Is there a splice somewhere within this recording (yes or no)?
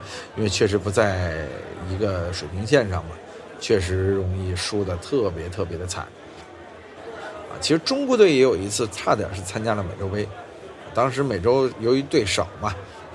yes